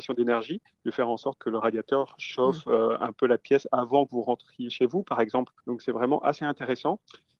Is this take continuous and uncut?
no; 2 cuts; at 1.4 s, 5.8 s

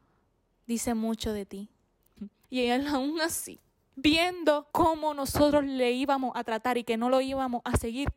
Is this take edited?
yes; 2 cuts; at 2.2 s, 4.7 s

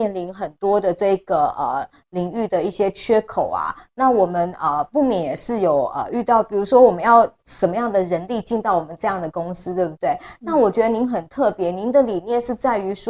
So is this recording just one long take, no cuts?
yes; 0 cuts

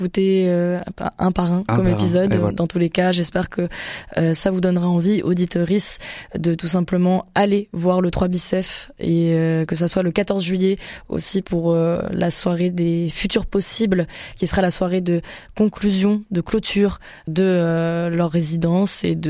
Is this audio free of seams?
no; 2 cuts; at 2.5 s, 17.3 s

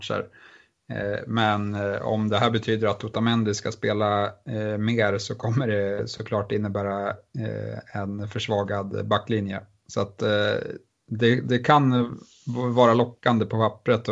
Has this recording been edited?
no; 0 cuts

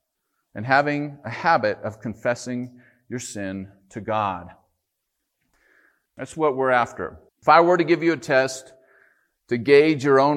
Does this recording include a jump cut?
yes; 2 cuts; at 6.1 s, 7.3 s

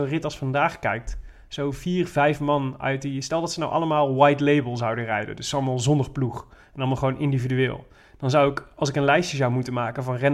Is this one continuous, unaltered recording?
yes; 0 cuts

